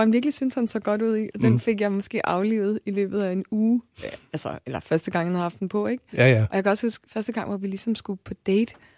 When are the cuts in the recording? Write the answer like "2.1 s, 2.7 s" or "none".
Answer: none